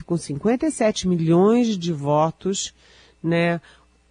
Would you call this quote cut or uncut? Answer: uncut